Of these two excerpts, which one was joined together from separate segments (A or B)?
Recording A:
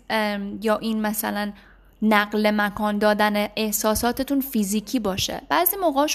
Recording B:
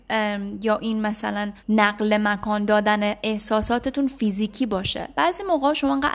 B